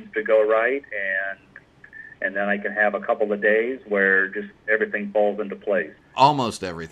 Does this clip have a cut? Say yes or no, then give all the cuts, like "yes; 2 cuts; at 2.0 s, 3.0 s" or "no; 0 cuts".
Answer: yes; 1 cut; at 6.0 s